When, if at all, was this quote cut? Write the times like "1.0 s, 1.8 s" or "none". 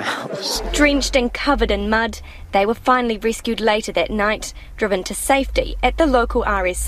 none

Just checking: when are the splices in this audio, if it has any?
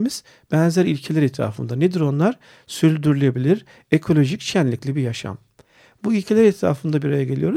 none

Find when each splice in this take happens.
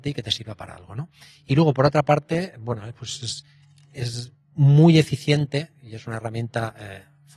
none

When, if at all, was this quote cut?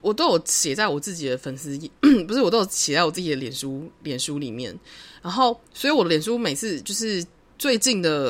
none

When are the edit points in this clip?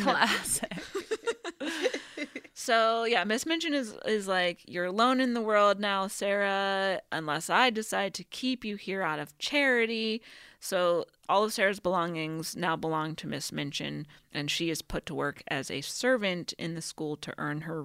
none

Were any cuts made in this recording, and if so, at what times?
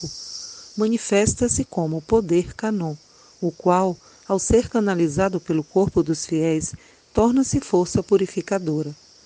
none

